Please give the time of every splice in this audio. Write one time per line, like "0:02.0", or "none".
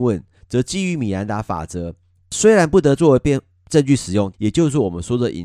0:02.2
0:04.3